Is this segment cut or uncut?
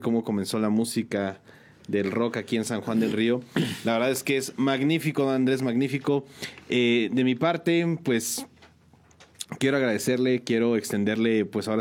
uncut